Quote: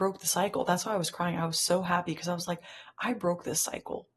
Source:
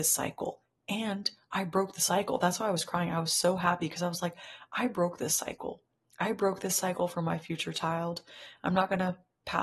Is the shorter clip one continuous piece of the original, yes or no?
yes